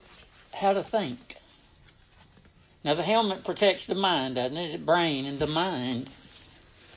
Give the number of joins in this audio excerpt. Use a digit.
0